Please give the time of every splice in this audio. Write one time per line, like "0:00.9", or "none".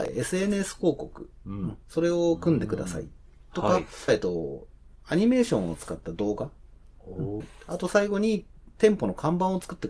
0:04.1
0:07.4

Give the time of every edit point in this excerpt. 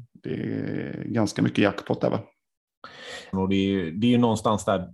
0:03.3

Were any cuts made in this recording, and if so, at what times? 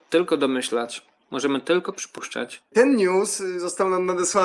0:02.7

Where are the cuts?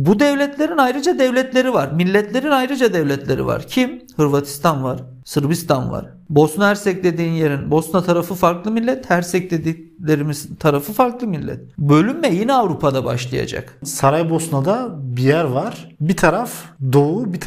none

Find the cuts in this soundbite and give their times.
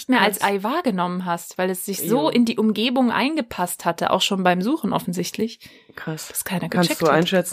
none

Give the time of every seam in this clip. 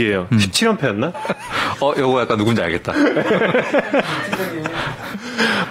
0:01.1

